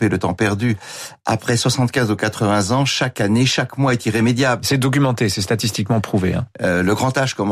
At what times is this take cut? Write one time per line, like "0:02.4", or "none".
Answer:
0:04.6
0:06.5